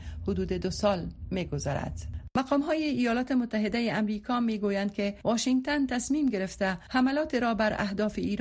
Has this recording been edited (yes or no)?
no